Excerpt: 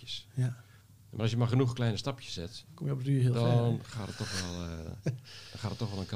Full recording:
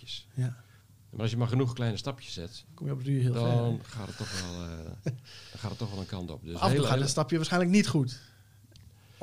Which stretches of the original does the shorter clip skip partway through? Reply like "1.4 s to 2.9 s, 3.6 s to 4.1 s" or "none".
none